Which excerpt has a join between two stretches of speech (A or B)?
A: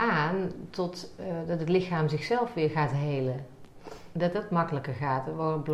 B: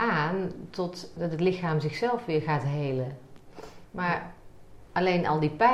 B